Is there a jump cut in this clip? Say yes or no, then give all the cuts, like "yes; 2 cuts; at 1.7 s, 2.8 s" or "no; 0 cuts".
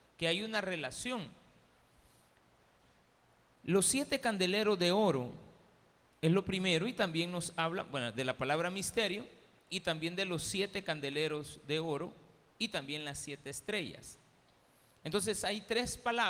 no; 0 cuts